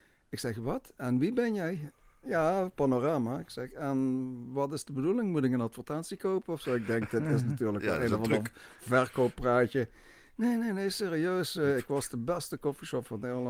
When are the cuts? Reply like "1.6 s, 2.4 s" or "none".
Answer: none